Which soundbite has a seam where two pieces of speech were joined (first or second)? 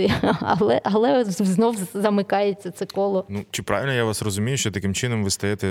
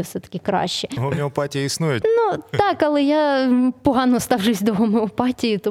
second